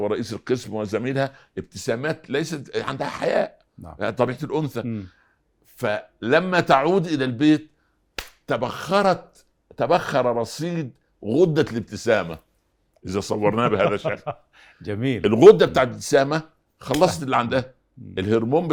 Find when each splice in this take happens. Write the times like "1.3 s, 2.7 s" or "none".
none